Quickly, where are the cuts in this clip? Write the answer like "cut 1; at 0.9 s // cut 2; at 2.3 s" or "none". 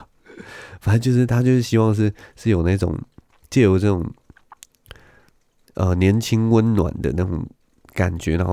none

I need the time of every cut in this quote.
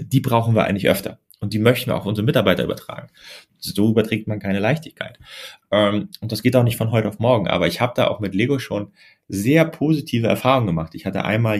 cut 1; at 3.5 s

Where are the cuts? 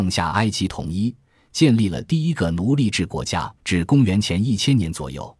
cut 1; at 3.6 s

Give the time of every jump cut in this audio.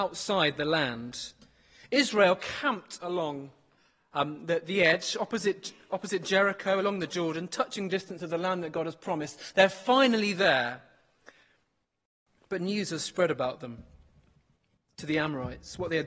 none

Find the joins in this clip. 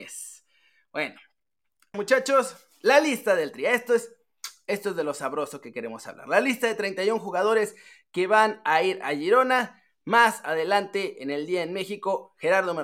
cut 1; at 1.9 s

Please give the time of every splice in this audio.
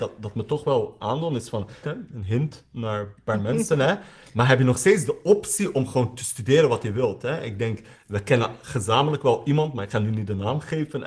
cut 1; at 1.8 s

